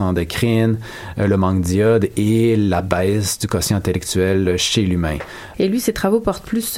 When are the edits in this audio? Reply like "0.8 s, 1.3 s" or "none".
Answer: 5.5 s